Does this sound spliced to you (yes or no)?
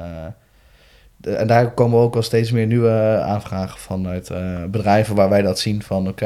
no